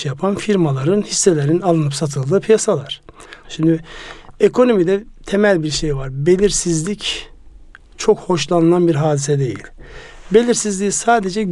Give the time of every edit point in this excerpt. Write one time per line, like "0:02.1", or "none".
0:03.4